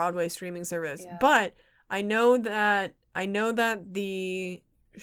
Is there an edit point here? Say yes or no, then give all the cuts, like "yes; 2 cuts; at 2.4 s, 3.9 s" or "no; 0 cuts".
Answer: no; 0 cuts